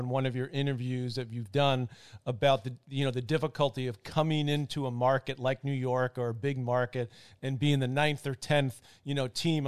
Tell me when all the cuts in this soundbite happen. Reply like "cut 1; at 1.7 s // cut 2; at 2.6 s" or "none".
none